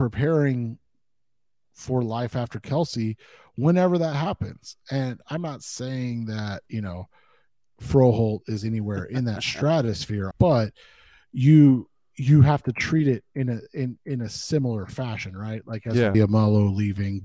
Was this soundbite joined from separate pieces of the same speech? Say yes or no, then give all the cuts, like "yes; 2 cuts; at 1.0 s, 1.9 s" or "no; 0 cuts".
yes; 2 cuts; at 10.3 s, 16.1 s